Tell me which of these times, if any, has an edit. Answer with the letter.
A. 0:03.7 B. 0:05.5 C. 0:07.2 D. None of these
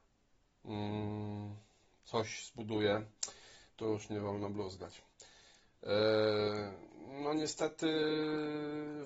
A